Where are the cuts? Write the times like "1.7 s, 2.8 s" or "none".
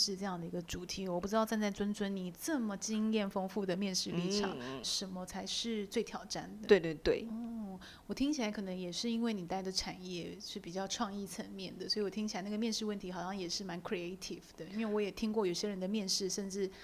4.8 s, 6.7 s